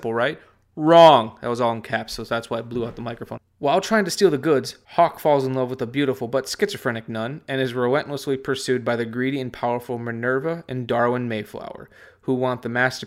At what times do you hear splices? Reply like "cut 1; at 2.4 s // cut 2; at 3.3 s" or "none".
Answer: cut 1; at 3.4 s // cut 2; at 4.8 s